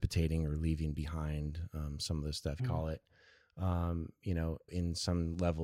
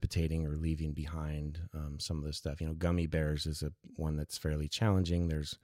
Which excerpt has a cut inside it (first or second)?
first